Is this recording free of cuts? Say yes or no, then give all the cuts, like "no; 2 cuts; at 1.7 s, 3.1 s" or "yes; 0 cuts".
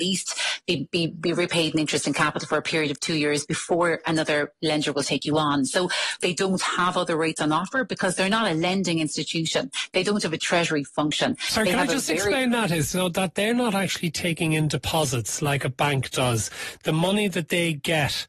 no; 1 cut; at 6.2 s